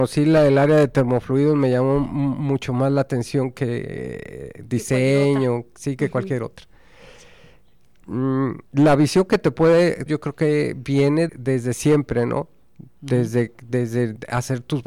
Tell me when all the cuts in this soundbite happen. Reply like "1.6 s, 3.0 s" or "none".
8.7 s, 10.1 s, 11.3 s